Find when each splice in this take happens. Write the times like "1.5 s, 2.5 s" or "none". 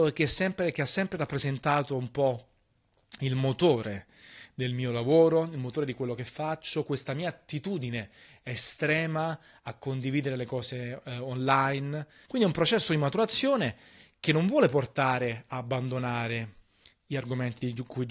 12.3 s